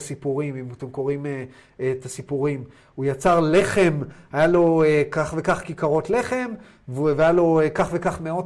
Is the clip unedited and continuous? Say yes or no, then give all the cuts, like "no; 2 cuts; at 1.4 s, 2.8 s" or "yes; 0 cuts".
yes; 0 cuts